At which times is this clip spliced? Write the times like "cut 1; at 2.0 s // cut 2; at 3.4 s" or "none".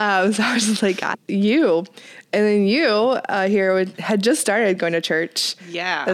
cut 1; at 1.1 s